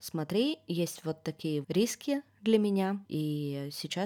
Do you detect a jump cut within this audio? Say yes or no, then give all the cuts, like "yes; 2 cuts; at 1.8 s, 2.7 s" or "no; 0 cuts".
yes; 1 cut; at 1.6 s